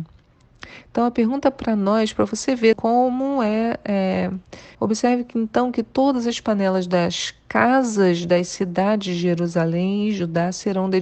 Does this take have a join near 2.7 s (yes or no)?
yes